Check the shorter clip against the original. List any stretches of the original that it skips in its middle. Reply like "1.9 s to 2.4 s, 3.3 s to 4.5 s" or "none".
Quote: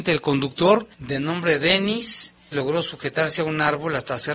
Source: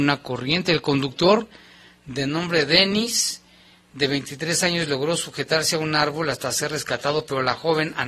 1.5 s to 2.0 s, 3.6 s to 4.9 s

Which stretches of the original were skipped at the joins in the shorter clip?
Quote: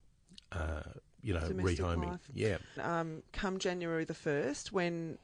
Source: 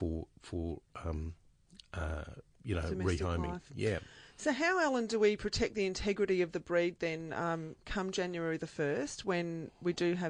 4.2 s to 7.3 s

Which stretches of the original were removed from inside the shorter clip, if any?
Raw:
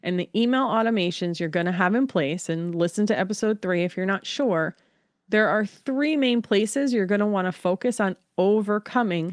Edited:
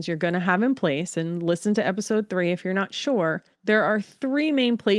4.8 s to 5.2 s

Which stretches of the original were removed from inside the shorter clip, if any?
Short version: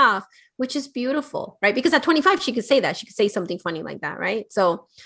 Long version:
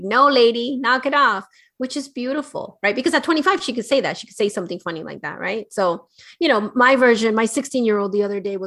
none

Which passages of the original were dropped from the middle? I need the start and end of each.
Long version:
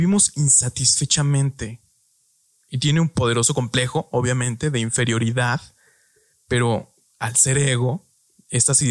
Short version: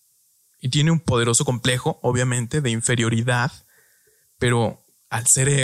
none

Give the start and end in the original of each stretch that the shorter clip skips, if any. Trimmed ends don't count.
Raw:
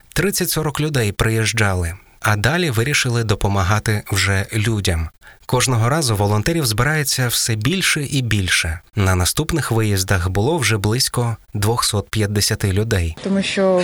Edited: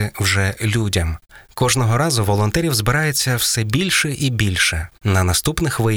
none

